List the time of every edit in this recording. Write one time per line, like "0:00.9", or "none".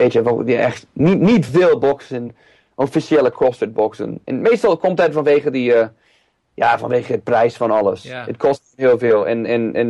none